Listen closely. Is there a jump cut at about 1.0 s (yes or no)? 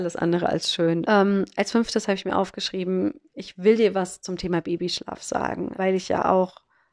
yes